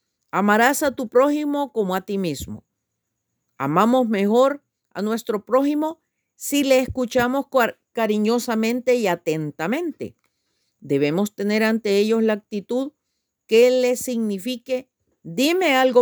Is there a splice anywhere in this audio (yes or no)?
no